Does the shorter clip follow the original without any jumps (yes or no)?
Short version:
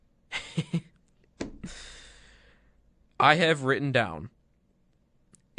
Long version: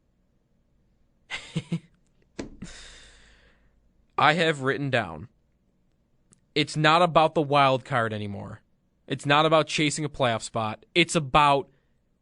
yes